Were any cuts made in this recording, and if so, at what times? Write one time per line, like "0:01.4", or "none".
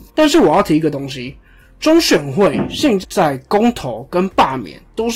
0:03.0